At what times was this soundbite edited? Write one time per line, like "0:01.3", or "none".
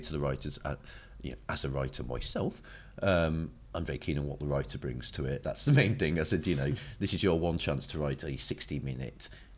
0:05.4